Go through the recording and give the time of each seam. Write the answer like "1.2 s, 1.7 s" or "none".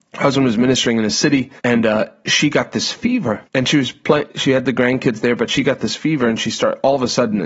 1.6 s, 3.5 s